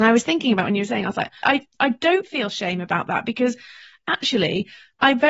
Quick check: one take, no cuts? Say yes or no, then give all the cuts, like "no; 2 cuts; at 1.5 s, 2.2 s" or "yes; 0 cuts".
no; 1 cut; at 1.4 s